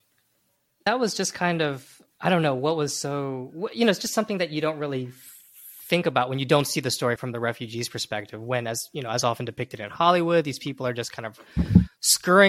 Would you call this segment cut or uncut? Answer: uncut